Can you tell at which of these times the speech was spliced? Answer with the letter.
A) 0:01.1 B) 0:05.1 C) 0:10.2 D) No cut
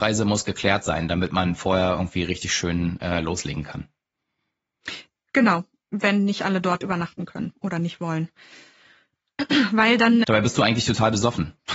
C